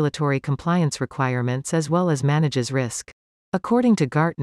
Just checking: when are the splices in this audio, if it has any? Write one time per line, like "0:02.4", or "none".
0:03.3